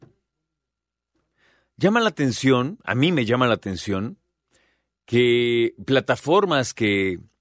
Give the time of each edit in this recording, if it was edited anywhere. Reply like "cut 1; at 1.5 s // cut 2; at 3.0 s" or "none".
none